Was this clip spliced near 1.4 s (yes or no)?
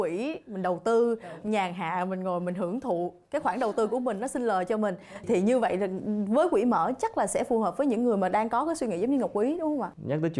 yes